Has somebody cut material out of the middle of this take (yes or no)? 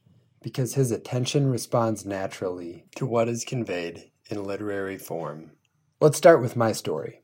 no